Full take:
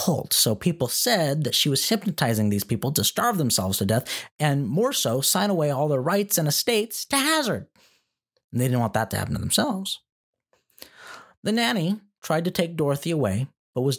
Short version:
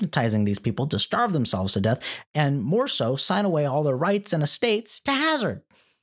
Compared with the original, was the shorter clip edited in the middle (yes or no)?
no